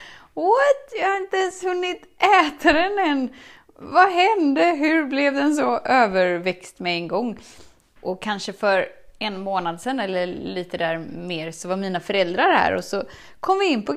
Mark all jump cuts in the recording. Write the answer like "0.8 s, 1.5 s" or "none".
none